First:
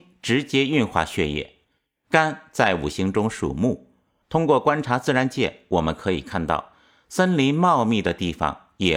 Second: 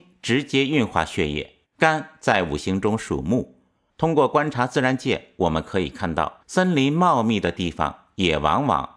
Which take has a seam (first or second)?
second